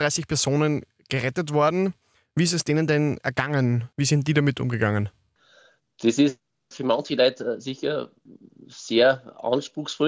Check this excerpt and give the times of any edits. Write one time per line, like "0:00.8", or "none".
0:03.9